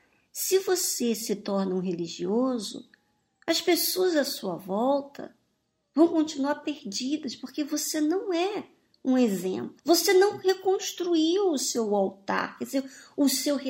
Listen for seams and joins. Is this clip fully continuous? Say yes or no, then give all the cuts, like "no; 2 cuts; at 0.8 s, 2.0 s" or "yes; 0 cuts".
no; 1 cut; at 9.8 s